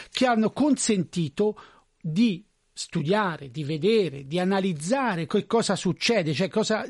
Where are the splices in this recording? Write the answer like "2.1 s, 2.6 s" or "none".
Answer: 5.3 s